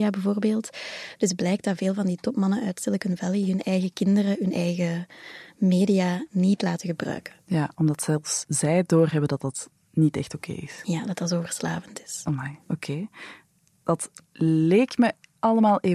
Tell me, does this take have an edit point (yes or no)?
no